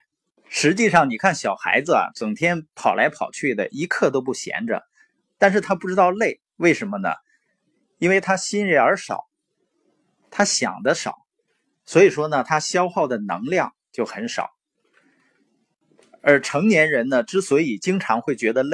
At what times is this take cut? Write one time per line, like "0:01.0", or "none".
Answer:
none